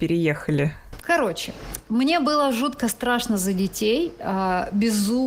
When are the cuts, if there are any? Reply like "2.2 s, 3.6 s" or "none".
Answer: 1.0 s, 4.2 s